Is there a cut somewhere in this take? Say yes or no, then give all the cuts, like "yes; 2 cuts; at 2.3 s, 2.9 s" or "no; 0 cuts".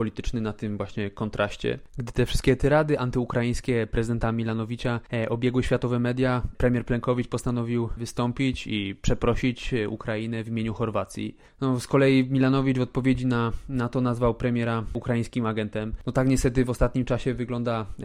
no; 0 cuts